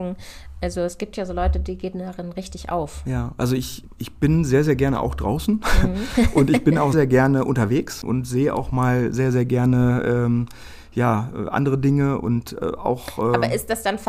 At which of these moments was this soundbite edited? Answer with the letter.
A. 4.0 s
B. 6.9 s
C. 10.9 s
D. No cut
B